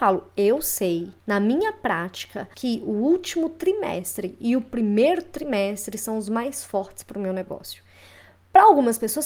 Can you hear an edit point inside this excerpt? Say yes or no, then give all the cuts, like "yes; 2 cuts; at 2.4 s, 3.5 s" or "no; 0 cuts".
yes; 2 cuts; at 1.2 s, 2.5 s